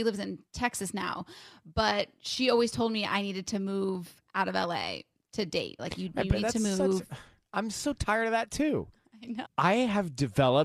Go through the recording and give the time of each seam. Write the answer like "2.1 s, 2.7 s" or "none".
5.8 s, 9.4 s